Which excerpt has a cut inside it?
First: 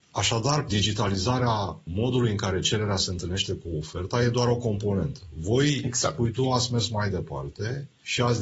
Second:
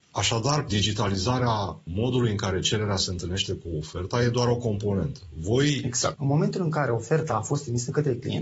second; 1 cut; at 6.1 s

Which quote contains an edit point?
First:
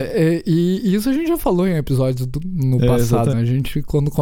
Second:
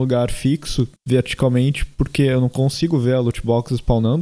first; 1 cut; at 3.3 s

